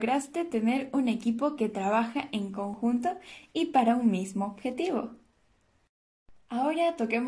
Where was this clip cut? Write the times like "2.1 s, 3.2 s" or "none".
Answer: none

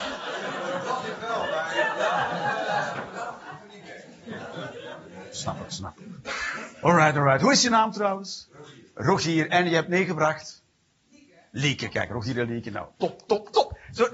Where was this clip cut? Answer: none

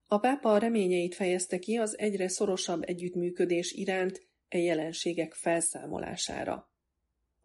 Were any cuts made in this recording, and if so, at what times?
none

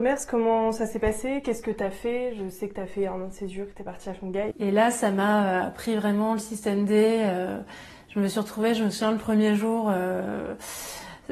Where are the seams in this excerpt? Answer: 4.5 s

